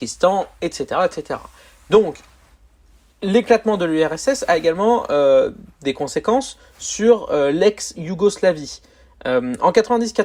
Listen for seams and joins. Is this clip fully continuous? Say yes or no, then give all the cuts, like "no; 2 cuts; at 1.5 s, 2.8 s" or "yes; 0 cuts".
yes; 0 cuts